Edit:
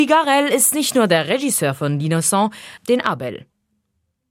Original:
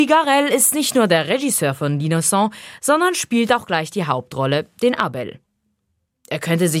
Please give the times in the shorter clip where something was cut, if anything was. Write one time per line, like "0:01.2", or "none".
0:02.8